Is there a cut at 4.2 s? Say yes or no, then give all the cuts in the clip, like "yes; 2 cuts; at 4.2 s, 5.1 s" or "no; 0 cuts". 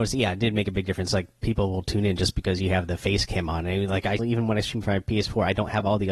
yes; 1 cut; at 4.2 s